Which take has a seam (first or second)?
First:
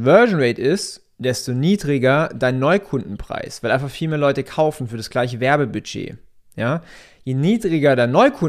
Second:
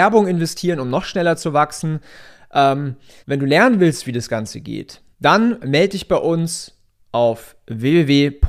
second